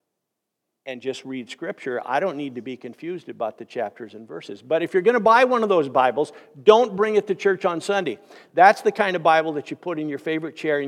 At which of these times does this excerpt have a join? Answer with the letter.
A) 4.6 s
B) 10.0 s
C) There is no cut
C